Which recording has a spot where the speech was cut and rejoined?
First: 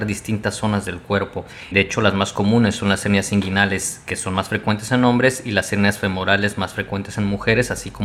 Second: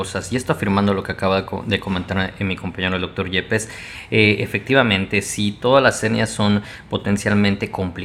first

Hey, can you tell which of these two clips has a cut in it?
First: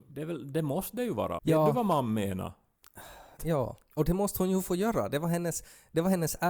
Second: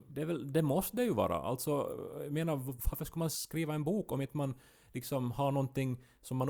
first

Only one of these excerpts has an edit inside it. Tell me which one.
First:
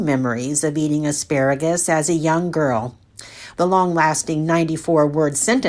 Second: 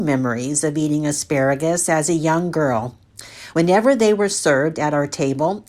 first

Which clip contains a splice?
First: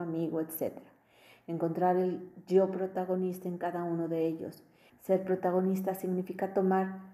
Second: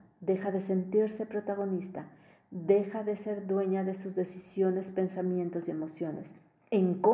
first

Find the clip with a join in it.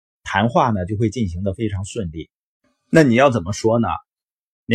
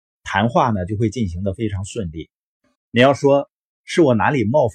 second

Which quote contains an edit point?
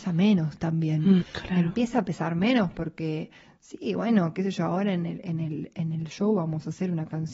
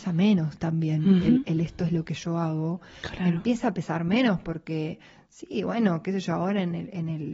first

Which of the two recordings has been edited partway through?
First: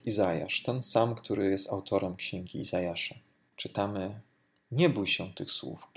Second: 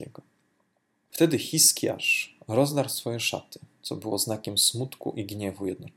first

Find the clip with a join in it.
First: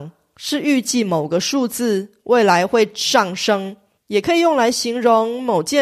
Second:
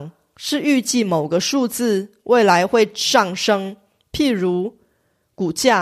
first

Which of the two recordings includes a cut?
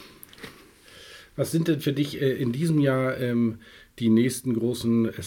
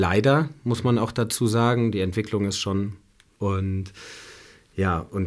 second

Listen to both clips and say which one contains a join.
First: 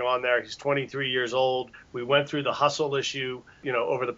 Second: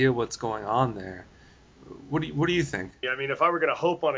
second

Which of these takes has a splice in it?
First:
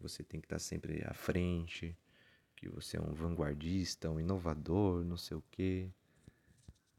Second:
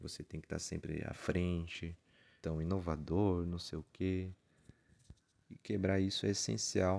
second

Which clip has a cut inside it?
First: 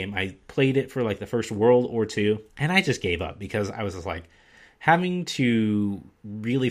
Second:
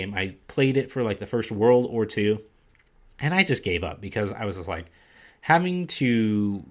first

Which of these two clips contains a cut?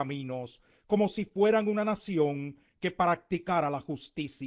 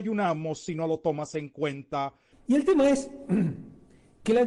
second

